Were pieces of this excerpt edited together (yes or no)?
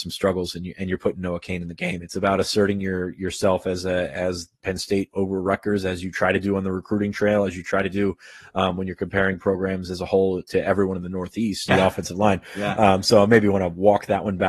yes